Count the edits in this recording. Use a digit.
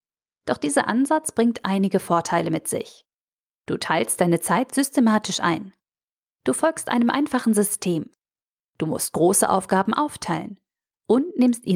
0